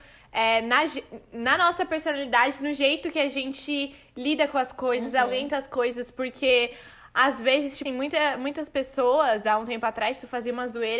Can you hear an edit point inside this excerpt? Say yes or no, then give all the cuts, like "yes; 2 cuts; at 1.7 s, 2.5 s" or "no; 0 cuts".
yes; 1 cut; at 7.9 s